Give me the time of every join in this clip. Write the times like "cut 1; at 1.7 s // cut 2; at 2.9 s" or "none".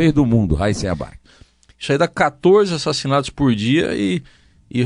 cut 1; at 1.2 s